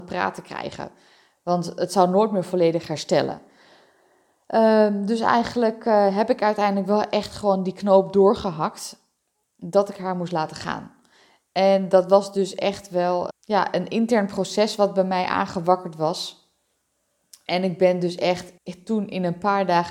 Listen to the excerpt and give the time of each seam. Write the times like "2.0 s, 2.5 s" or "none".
13.3 s, 18.6 s